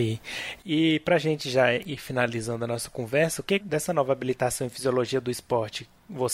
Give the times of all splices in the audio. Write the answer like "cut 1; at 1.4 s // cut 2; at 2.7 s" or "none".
cut 1; at 3.6 s